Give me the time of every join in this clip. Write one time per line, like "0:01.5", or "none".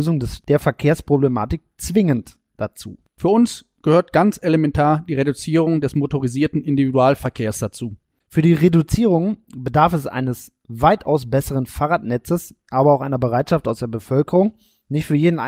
none